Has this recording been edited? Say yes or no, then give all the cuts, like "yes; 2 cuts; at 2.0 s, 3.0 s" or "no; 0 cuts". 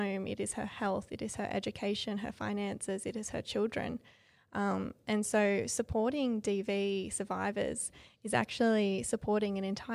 no; 0 cuts